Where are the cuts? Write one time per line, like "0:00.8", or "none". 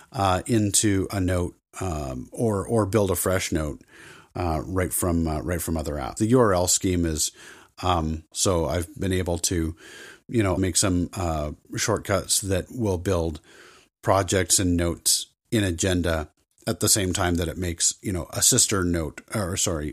0:06.2
0:08.3
0:10.6